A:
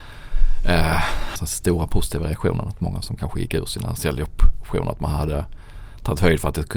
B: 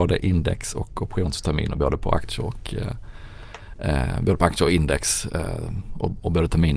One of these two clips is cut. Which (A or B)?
A